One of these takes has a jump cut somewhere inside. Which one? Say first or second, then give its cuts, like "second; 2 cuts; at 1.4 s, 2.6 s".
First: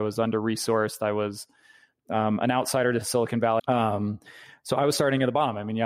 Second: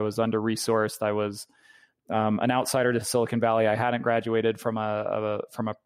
first; 1 cut; at 3.6 s